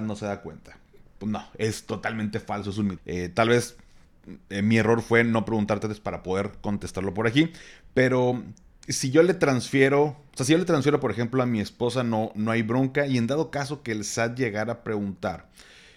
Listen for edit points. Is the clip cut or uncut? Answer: cut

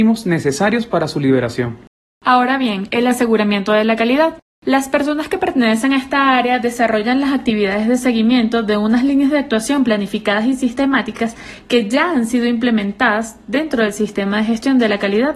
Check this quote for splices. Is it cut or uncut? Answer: uncut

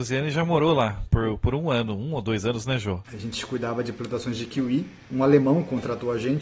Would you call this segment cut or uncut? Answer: cut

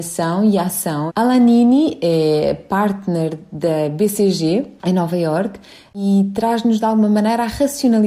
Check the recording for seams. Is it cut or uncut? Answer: cut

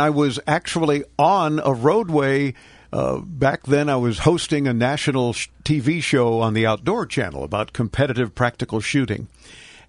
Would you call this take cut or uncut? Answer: uncut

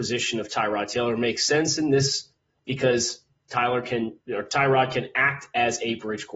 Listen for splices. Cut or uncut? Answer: cut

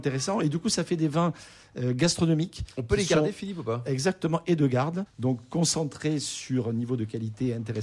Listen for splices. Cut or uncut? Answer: cut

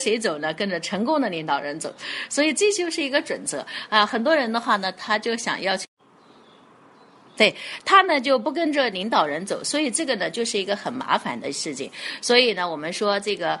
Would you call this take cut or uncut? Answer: uncut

